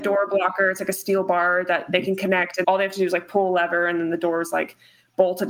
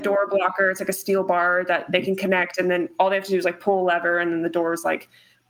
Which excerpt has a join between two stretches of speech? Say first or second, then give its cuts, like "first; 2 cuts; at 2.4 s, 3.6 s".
first; 1 cut; at 2.6 s